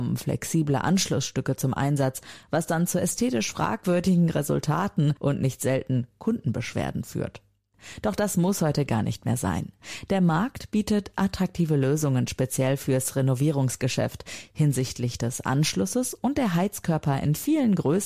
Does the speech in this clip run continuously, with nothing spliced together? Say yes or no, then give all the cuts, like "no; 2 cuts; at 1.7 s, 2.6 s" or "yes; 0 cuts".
yes; 0 cuts